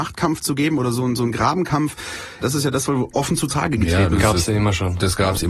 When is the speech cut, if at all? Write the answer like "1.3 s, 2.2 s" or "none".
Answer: 2.4 s